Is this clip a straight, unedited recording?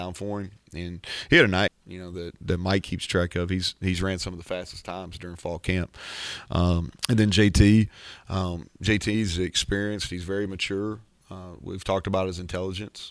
no; 2 cuts; at 1.7 s, 7.0 s

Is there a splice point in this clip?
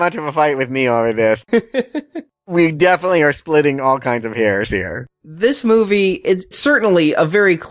no; 0 cuts

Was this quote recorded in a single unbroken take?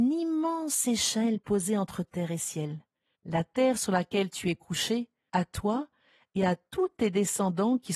no; 2 cuts; at 3.1 s, 5.3 s

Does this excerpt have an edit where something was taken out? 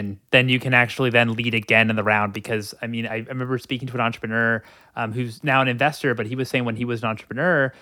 no; 0 cuts

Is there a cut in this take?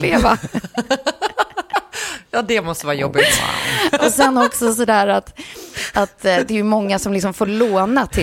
yes; 1 cut; at 4.0 s

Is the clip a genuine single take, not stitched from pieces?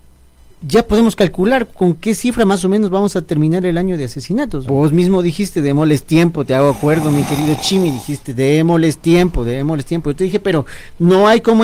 no; 1 cut; at 4.6 s

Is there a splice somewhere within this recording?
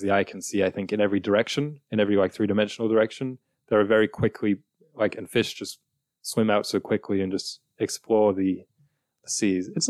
no; 0 cuts

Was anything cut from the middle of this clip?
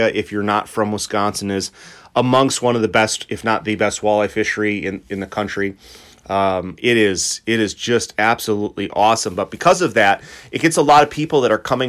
no; 0 cuts

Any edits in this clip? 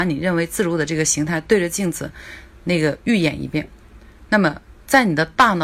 no; 0 cuts

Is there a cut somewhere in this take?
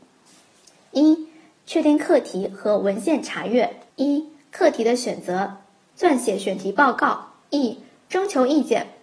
yes; 3 cuts; at 3.9 s, 5.9 s, 7.4 s

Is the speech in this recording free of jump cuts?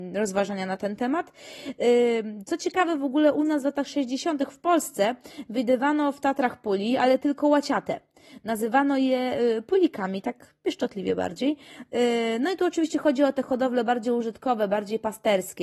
yes; 0 cuts

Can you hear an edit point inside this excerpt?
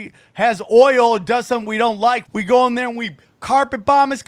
yes; 1 cut; at 2.2 s

